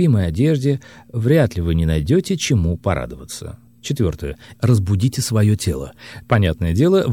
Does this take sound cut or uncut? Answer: cut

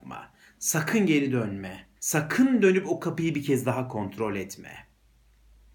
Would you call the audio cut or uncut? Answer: cut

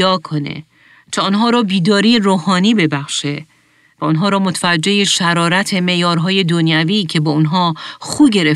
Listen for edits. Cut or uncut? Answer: uncut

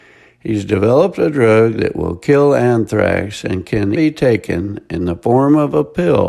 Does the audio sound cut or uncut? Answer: cut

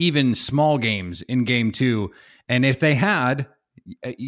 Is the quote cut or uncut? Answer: uncut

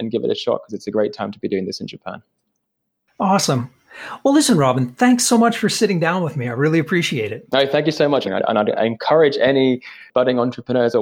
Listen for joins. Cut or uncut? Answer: cut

